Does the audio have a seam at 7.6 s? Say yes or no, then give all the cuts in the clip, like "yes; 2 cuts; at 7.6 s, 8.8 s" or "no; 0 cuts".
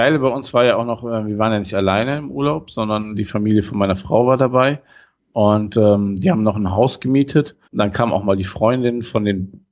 yes; 1 cut; at 7.6 s